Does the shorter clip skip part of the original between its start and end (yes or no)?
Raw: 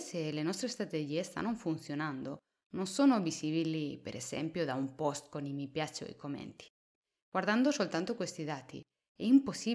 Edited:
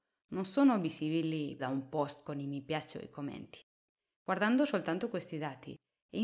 yes